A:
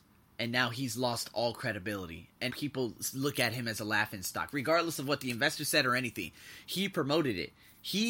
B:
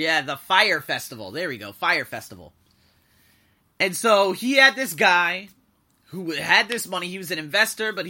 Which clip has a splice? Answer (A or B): A